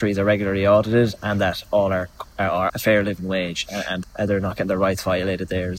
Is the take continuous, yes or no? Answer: no